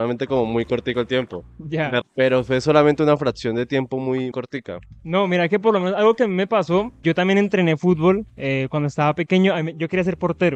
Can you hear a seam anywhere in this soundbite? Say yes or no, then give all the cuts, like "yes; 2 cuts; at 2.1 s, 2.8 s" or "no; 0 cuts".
yes; 3 cuts; at 2.0 s, 4.3 s, 7.0 s